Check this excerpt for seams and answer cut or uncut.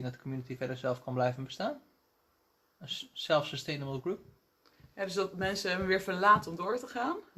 uncut